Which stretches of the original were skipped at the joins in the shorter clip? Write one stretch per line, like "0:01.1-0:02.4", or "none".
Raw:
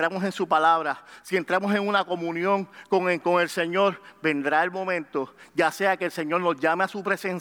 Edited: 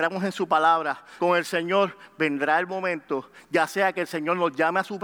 0:01.2-0:03.2